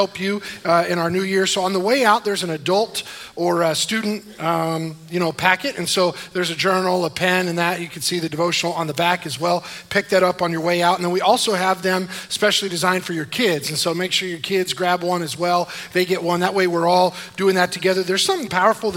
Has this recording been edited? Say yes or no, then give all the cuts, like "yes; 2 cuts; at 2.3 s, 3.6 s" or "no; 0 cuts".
no; 0 cuts